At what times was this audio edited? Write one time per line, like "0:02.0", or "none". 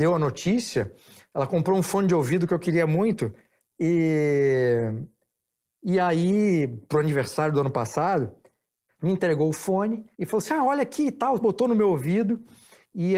0:08.9
0:10.1
0:11.4